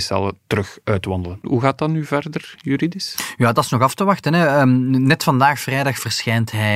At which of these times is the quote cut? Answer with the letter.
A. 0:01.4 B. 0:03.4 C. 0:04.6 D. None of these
A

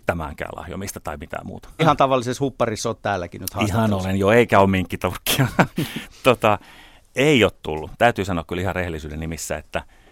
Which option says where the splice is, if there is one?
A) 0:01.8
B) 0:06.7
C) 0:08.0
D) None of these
A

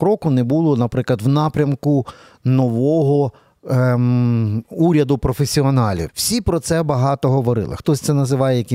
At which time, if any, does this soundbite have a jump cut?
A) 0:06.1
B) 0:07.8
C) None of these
A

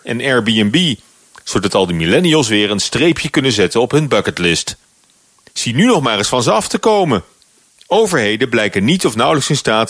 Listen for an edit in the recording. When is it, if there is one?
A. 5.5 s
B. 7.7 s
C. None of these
A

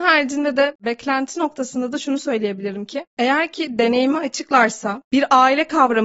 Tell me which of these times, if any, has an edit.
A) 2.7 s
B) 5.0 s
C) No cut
B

